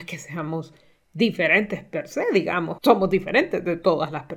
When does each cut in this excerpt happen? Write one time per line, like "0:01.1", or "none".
0:02.8